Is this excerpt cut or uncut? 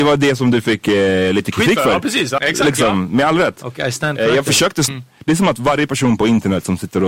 cut